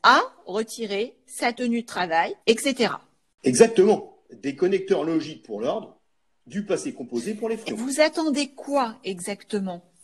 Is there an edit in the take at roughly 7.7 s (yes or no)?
yes